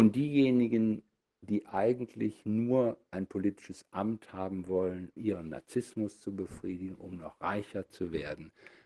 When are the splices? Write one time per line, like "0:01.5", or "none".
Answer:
0:05.2